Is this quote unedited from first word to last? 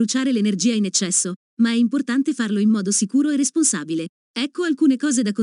no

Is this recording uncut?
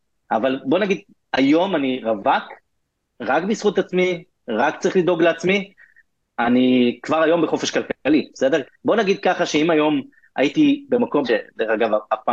no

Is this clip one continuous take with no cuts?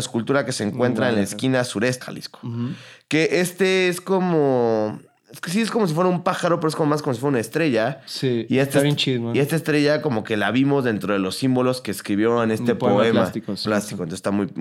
no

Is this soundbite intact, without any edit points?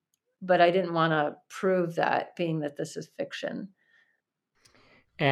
yes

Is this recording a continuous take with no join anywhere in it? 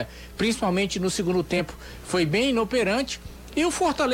yes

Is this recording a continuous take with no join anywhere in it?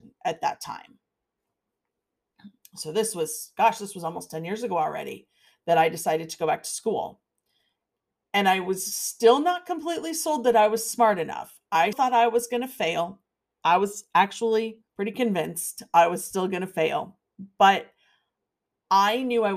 no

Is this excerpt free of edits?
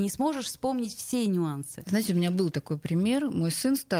yes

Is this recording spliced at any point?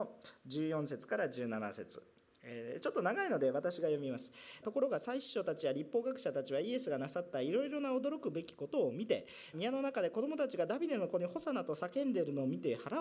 yes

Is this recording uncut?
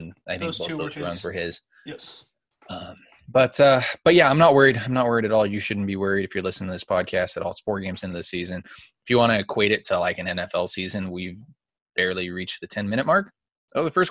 yes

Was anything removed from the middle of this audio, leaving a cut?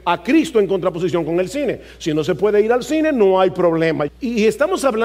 yes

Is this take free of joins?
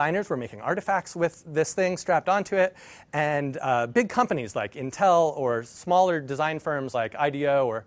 yes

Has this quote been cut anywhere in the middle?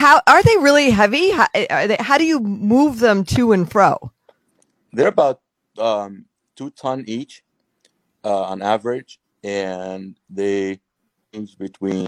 no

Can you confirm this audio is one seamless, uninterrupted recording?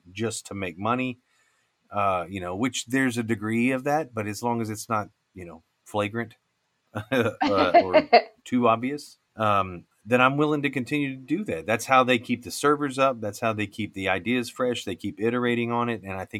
no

